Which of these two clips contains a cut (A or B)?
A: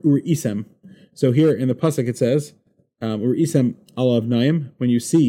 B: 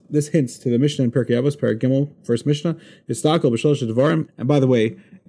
B